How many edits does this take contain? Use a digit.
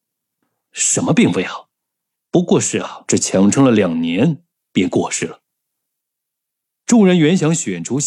1